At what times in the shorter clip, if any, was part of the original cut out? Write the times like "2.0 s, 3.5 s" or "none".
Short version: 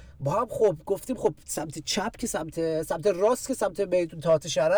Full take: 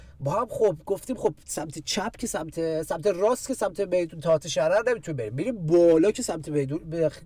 none